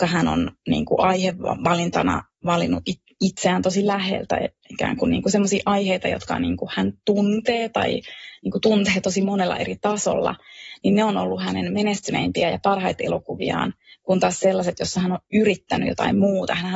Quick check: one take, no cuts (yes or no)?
yes